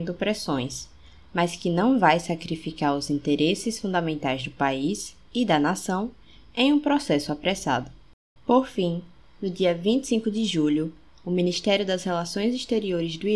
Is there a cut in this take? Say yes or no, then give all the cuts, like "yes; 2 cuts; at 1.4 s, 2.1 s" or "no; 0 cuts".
yes; 1 cut; at 8.4 s